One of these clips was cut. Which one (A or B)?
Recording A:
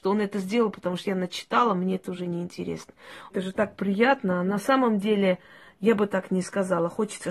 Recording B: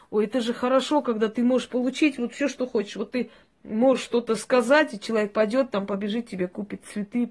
A